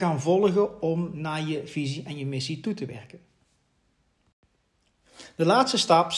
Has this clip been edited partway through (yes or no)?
no